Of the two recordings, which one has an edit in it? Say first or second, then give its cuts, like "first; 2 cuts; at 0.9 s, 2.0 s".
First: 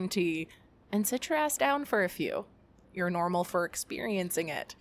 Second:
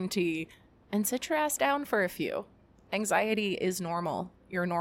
first; 1 cut; at 2.8 s